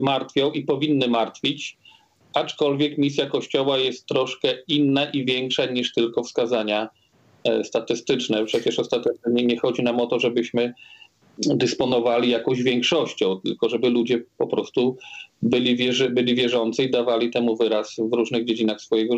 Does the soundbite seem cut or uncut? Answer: uncut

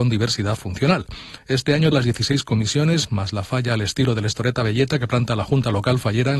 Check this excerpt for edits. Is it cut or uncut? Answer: cut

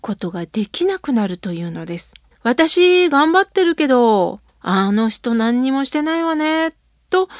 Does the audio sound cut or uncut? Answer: cut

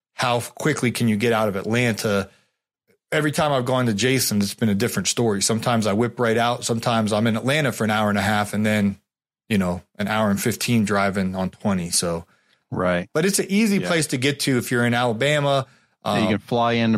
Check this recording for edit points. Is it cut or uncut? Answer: uncut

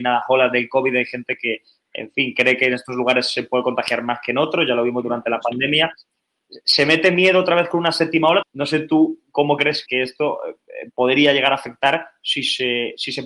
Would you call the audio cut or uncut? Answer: cut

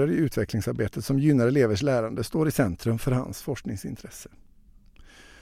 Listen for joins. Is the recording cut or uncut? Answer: uncut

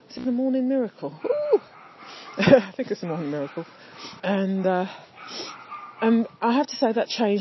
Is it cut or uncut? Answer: cut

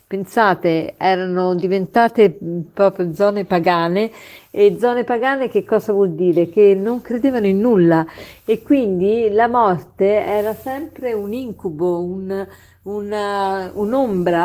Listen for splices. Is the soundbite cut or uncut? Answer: uncut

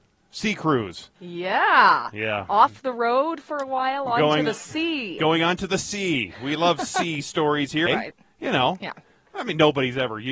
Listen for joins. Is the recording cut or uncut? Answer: cut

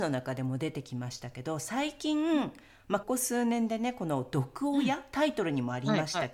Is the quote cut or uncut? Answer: cut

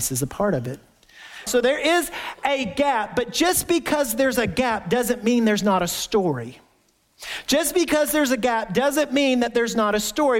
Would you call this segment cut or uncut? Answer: cut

